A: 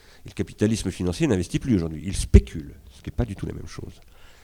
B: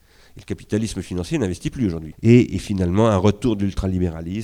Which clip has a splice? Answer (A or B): B